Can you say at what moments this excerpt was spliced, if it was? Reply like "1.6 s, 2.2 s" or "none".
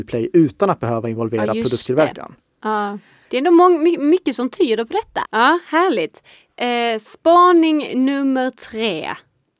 3.2 s, 5.2 s